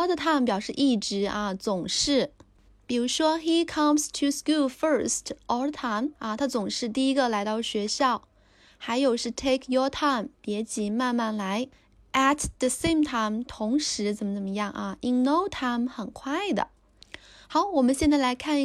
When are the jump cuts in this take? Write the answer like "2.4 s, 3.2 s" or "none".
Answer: 6.2 s